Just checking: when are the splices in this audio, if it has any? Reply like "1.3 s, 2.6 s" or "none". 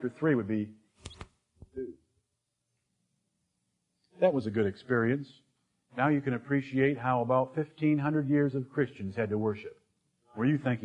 none